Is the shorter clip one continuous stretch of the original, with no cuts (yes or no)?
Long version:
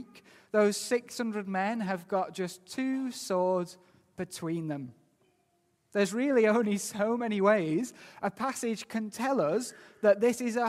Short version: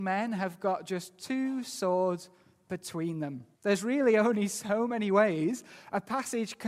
no